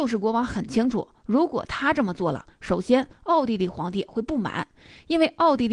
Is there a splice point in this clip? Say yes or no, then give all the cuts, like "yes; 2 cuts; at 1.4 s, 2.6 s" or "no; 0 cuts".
no; 0 cuts